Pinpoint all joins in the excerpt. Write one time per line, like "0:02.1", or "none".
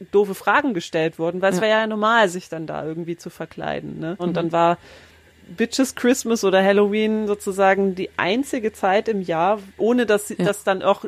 0:04.2
0:09.8